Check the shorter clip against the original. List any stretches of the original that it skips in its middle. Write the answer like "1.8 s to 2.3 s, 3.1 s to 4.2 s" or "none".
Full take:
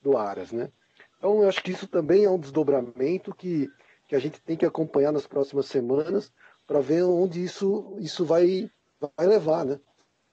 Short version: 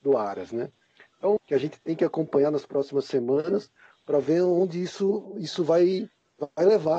1.4 s to 4.0 s